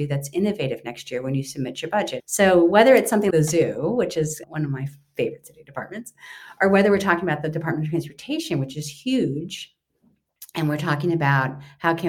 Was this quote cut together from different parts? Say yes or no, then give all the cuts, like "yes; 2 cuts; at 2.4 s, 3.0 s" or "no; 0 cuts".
yes; 2 cuts; at 2.2 s, 3.3 s